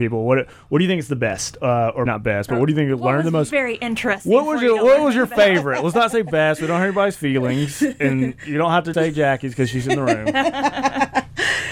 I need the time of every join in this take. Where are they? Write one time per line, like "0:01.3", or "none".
0:02.1
0:08.9